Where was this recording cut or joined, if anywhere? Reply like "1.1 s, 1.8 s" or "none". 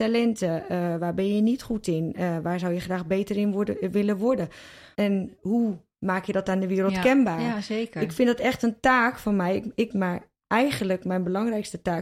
4.9 s, 9.9 s